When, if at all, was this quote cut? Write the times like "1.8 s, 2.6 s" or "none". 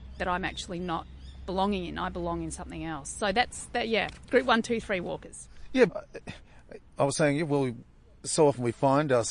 5.9 s